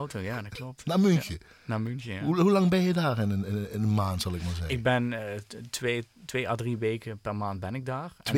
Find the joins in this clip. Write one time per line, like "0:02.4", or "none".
none